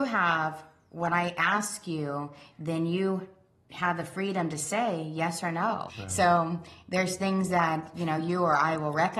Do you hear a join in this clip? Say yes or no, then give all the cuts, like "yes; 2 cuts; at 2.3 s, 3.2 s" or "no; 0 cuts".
yes; 1 cut; at 5.9 s